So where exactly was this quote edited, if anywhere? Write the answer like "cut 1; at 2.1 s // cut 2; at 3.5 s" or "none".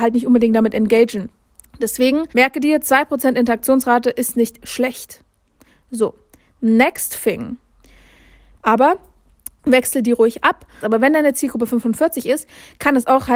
cut 1; at 2.3 s // cut 2; at 8.6 s // cut 3; at 10.8 s